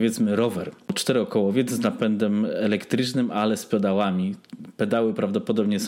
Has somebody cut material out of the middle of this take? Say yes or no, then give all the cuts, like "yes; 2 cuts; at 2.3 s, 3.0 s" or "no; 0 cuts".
no; 0 cuts